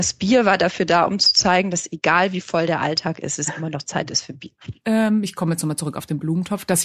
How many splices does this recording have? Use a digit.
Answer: 1